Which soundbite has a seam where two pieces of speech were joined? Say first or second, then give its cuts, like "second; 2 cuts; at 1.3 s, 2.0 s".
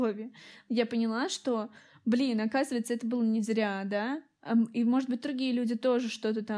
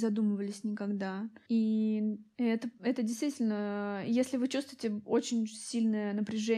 second; 1 cut; at 1.5 s